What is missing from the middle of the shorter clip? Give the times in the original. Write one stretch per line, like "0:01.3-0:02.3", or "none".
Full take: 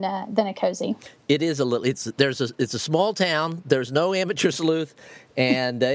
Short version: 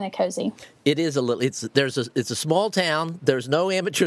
none